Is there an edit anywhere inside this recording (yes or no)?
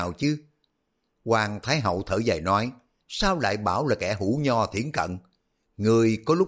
yes